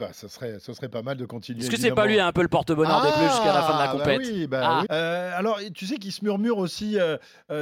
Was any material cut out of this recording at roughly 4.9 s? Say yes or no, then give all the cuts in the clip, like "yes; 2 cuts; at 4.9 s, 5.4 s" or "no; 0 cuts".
yes; 1 cut; at 4.9 s